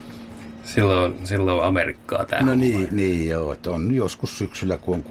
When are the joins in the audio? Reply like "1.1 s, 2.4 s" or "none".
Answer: none